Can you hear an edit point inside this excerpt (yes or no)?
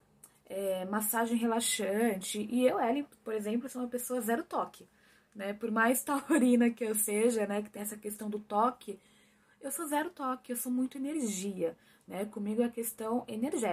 no